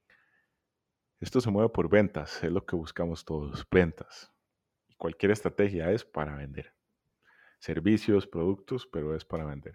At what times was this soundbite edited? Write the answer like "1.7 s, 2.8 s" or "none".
none